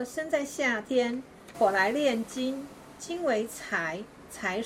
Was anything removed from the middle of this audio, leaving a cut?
yes; 1 cut; at 1.5 s

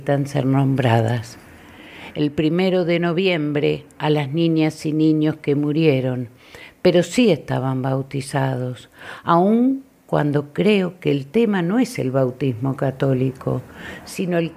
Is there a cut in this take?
no; 0 cuts

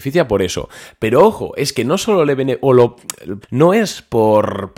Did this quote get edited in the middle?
yes; 1 cut; at 3.4 s

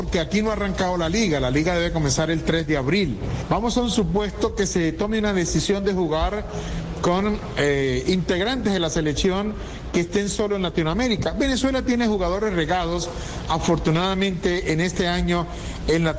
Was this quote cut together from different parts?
no; 0 cuts

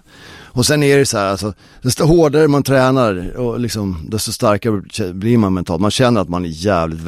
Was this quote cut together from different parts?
no; 0 cuts

